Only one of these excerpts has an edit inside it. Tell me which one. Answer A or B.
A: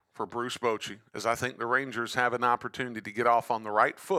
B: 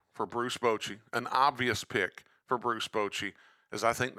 A